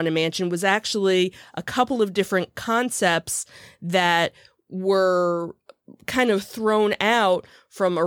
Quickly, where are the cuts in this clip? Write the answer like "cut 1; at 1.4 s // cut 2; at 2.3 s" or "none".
none